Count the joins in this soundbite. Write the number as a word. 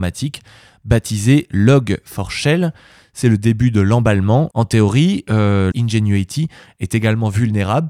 two